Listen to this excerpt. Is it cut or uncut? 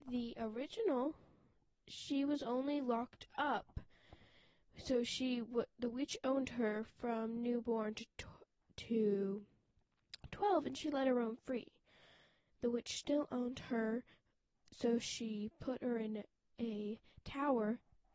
uncut